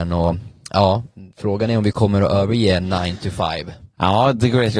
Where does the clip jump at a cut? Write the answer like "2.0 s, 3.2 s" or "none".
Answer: 1.3 s